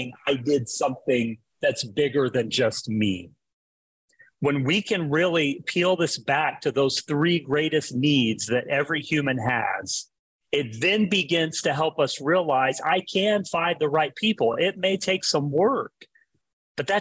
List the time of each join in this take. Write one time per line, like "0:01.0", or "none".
none

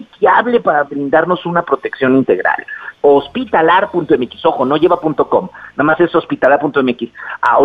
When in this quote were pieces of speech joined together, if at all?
0:02.9

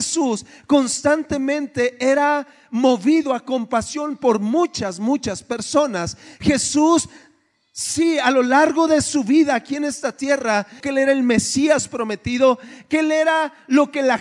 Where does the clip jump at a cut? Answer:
0:10.8

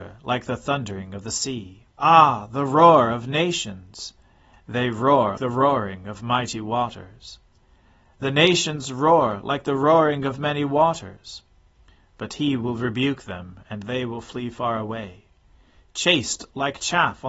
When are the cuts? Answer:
0:01.9
0:05.4

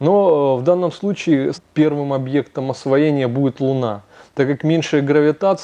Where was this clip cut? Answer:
0:01.5

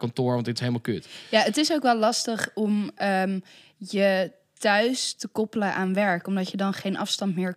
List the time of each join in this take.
none

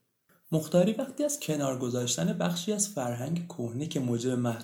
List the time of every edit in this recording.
none

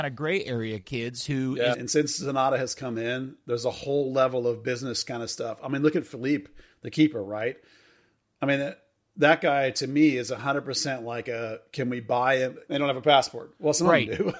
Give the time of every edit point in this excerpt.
0:01.7
0:12.7

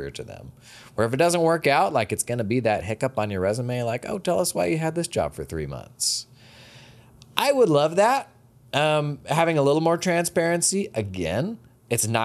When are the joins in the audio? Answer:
none

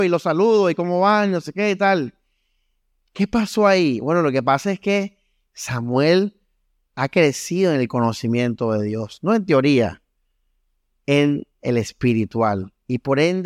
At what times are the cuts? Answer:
none

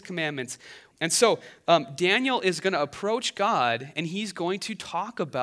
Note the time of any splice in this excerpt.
0:00.9

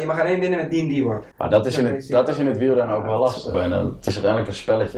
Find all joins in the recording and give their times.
0:01.3
0:03.5

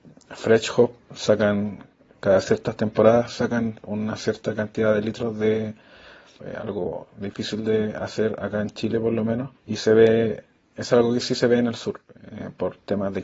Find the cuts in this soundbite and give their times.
0:06.4
0:09.6

